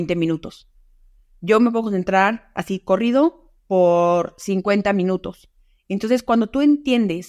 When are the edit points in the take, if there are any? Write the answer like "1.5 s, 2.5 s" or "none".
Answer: none